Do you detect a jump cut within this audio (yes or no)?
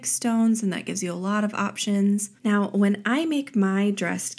yes